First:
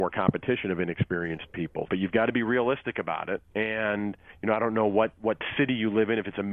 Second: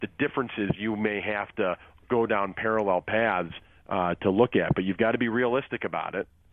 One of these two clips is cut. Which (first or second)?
first